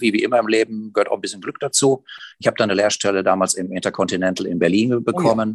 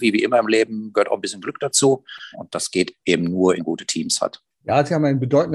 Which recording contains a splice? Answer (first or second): second